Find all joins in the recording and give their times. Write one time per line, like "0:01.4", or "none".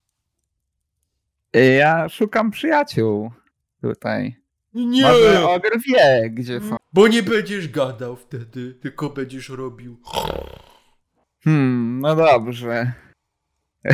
0:06.8
0:11.2

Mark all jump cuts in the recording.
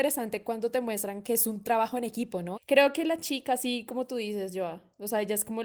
0:02.5

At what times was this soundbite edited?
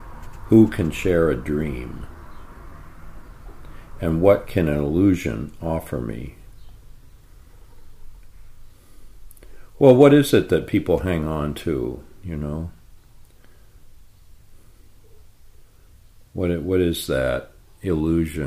none

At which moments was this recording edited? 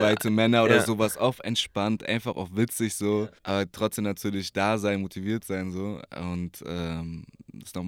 0:03.4

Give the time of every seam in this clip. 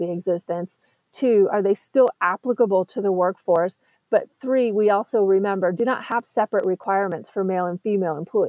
none

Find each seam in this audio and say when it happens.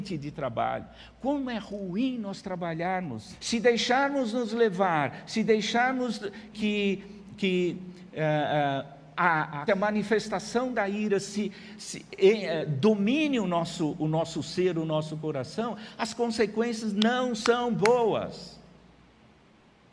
0:03.4
0:06.5
0:09.7

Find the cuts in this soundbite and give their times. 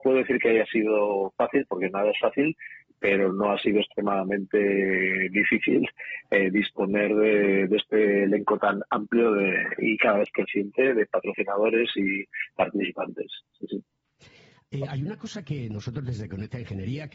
none

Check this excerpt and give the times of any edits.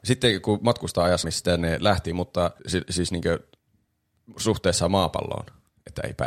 0:01.2
0:02.6

